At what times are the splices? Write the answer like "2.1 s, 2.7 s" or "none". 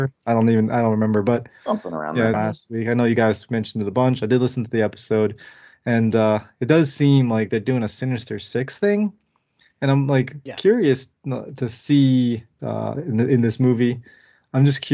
2.3 s, 11.2 s, 12.6 s